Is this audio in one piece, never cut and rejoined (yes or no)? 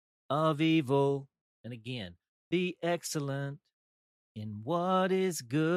yes